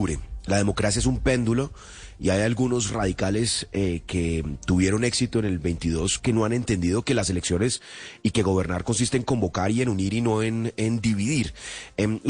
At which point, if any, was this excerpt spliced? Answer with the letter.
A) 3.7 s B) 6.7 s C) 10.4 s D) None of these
D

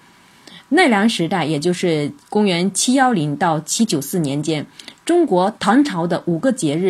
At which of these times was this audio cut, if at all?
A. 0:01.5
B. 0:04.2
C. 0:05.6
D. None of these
C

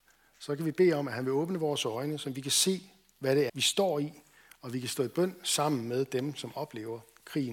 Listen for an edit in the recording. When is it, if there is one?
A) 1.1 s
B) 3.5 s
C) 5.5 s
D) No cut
B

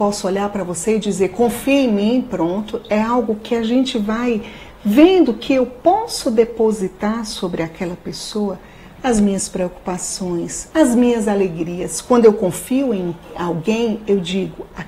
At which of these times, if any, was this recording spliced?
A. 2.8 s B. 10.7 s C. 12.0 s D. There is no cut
B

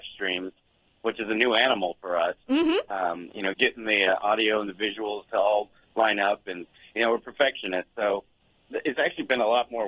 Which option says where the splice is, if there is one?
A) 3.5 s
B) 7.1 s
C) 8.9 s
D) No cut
A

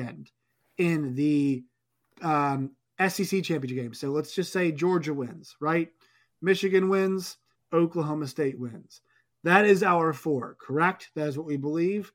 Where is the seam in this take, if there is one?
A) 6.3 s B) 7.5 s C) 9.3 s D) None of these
B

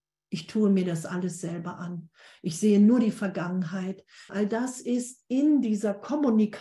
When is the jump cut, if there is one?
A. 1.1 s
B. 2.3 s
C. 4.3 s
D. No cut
C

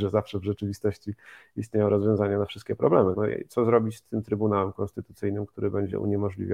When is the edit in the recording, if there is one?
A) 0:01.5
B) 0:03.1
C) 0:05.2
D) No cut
B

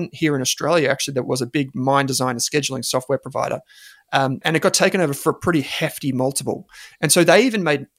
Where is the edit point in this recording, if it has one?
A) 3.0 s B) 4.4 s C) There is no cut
B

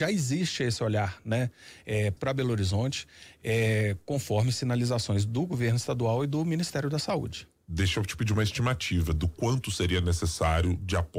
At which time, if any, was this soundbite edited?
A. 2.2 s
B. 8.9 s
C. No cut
A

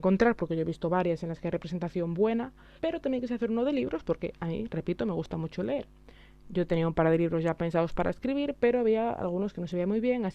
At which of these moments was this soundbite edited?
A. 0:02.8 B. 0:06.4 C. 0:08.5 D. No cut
A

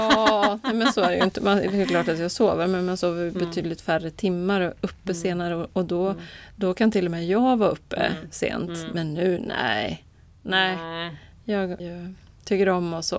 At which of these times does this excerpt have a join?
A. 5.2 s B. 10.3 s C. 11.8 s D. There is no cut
C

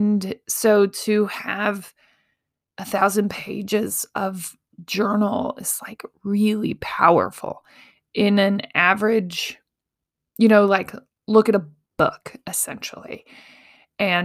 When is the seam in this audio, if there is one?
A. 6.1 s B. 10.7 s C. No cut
C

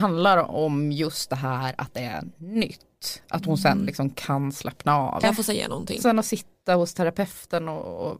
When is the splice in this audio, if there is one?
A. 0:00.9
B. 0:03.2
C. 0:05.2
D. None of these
C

